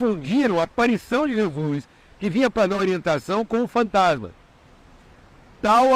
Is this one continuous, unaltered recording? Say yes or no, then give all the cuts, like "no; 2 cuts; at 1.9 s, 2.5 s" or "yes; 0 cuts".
yes; 0 cuts